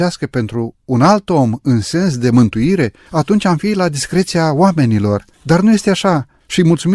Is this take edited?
no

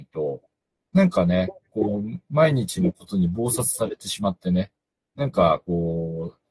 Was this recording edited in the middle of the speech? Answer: no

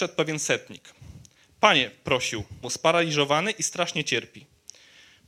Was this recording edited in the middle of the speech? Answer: yes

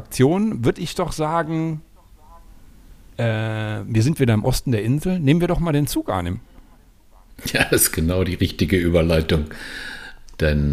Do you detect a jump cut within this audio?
no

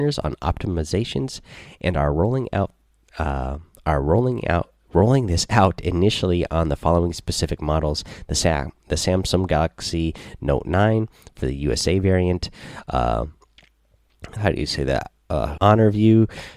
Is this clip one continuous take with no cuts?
no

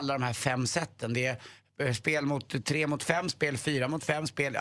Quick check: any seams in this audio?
no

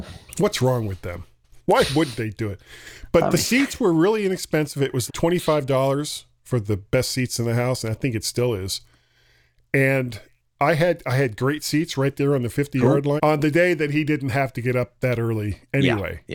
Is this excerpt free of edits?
no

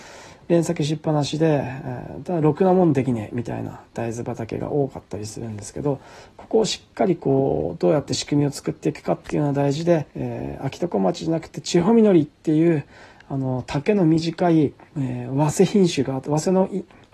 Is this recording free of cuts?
no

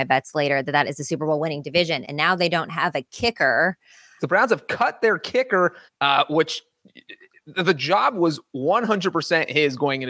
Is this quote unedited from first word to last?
no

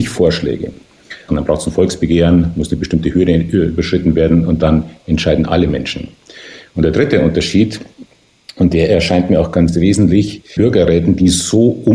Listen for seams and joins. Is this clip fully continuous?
no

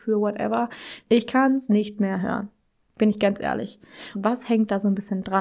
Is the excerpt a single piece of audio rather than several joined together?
no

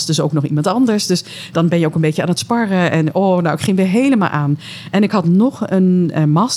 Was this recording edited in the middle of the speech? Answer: no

